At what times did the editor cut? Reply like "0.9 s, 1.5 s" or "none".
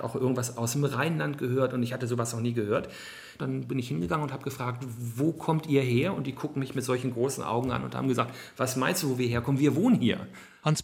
none